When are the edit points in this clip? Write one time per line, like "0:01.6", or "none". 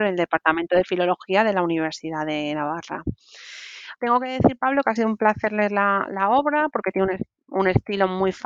0:04.0